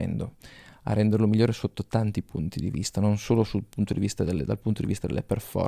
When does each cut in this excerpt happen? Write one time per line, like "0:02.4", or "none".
none